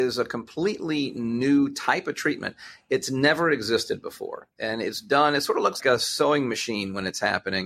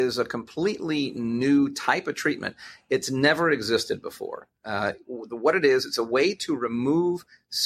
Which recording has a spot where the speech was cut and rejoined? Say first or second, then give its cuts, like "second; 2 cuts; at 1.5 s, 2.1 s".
first; 2 cuts; at 4.5 s, 5.8 s